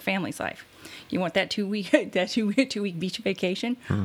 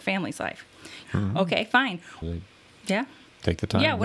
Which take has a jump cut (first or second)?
second